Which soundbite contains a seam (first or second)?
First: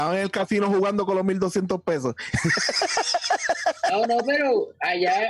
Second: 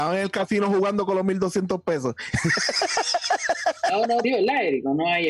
second